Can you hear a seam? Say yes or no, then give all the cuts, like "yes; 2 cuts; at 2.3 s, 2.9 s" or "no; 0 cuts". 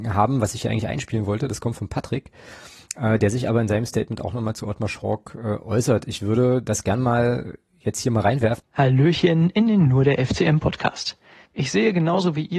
yes; 2 cuts; at 8.6 s, 11.5 s